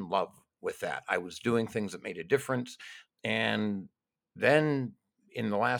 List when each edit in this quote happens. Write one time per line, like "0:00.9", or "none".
0:03.1